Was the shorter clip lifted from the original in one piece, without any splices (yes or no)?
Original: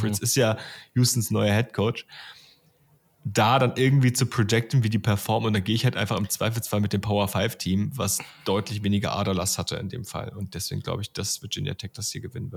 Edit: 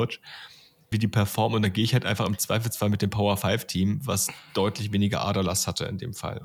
no